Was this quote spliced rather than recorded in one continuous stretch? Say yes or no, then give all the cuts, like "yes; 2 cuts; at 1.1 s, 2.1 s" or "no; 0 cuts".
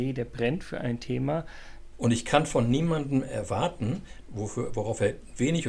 yes; 2 cuts; at 1.9 s, 4.2 s